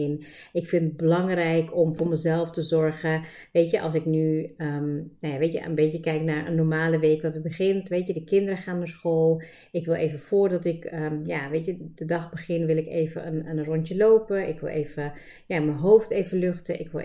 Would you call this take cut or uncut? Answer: uncut